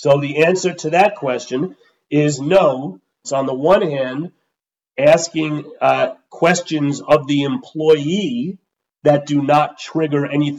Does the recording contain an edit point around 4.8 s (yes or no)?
no